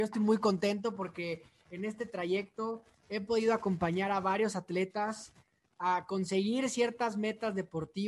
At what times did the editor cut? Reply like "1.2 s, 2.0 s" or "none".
none